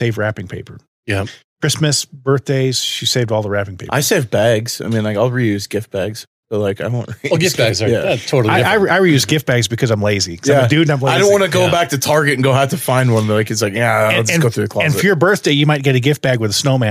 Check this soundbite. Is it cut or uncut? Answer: uncut